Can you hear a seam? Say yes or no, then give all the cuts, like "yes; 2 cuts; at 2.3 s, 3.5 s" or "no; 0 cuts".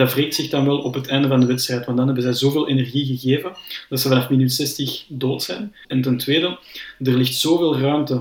yes; 1 cut; at 5.8 s